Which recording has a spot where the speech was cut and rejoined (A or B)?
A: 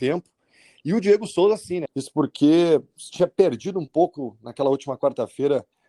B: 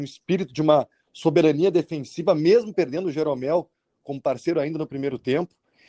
A